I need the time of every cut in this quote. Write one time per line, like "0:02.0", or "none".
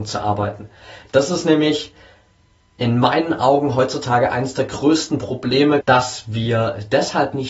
0:05.8